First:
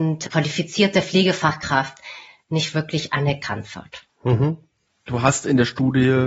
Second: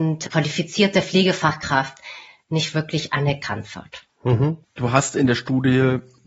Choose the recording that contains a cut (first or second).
second